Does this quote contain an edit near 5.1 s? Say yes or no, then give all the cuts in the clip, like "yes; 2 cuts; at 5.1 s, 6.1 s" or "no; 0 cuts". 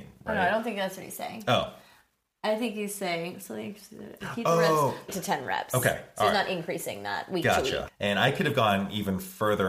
yes; 2 cuts; at 5.1 s, 7.9 s